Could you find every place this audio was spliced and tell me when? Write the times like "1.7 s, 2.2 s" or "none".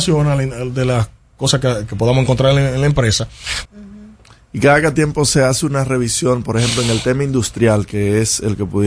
1.9 s, 3.7 s